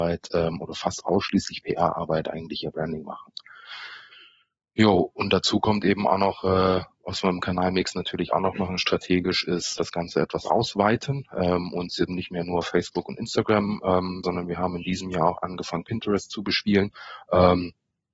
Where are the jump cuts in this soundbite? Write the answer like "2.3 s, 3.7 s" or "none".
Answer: 9.8 s, 12.1 s, 14.2 s